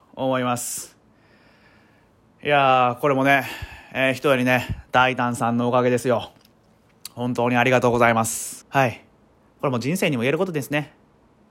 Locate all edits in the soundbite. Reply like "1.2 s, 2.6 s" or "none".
8.6 s